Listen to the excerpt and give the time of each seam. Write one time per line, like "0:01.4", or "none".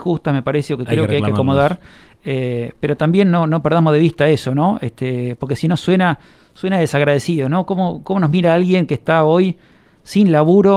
none